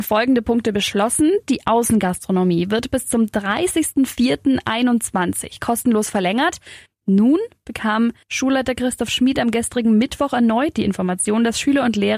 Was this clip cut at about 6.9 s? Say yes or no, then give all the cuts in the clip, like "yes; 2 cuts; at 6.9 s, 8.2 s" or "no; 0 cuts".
yes; 2 cuts; at 6.9 s, 8.2 s